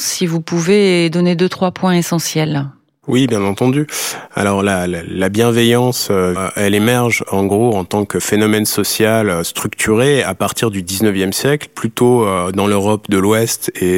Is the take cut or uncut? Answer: cut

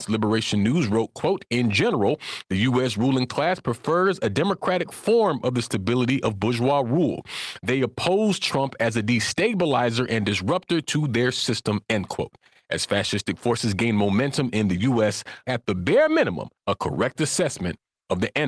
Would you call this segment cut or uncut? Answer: cut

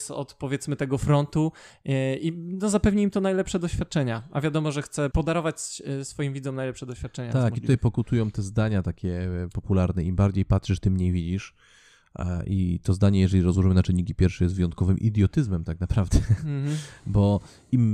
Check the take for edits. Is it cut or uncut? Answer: uncut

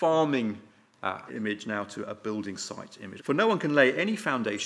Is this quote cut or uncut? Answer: cut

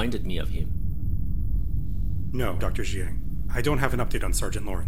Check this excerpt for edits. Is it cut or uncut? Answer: cut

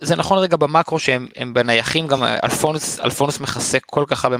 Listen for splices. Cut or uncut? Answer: uncut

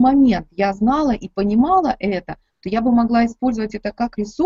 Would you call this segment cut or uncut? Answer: uncut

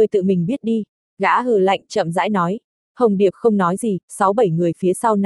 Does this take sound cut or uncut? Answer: uncut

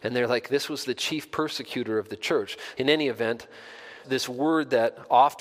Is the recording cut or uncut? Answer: cut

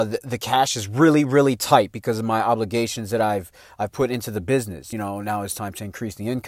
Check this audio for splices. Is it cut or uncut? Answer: uncut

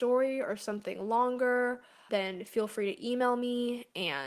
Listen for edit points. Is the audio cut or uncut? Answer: cut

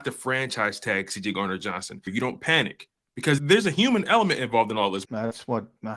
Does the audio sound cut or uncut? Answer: cut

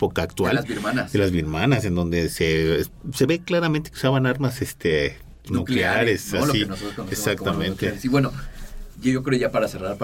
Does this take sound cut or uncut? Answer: uncut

